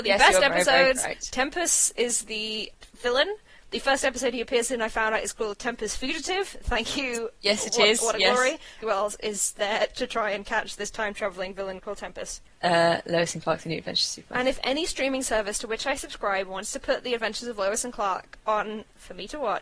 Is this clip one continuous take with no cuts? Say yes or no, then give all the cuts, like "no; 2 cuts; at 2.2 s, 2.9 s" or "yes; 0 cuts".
no; 2 cuts; at 8.8 s, 12.5 s